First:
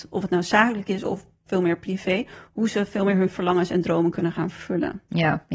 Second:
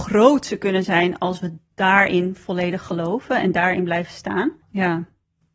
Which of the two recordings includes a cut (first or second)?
second